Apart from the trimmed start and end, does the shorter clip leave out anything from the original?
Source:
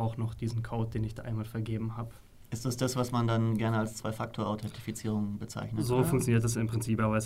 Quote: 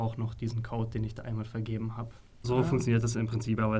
yes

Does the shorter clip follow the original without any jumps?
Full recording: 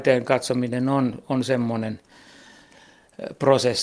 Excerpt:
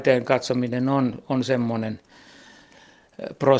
yes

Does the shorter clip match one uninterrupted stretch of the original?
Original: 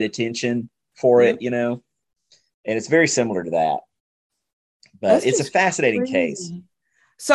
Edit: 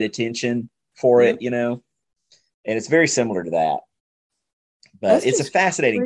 yes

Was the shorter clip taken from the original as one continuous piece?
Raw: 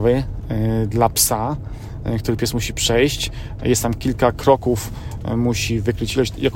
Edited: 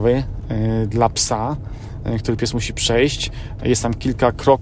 yes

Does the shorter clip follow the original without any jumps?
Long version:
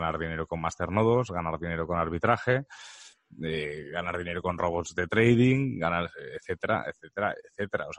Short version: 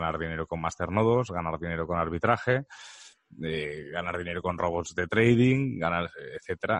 yes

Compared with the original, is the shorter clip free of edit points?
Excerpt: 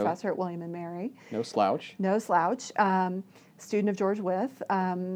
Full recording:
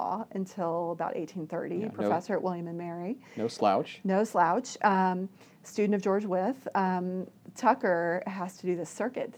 yes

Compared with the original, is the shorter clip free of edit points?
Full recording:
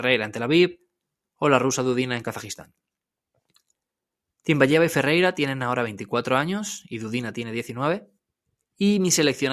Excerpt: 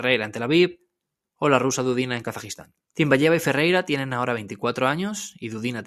no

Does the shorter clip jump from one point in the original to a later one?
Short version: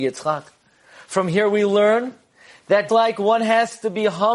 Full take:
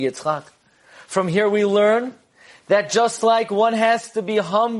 yes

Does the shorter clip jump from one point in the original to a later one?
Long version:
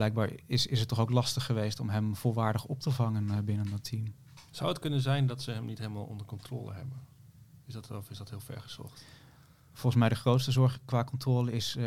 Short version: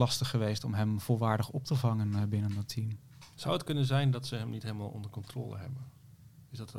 no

